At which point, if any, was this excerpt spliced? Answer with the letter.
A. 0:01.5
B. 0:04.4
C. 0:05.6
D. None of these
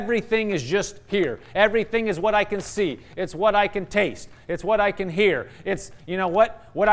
D